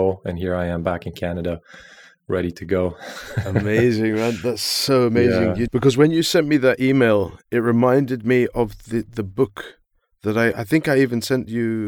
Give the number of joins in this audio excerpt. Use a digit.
1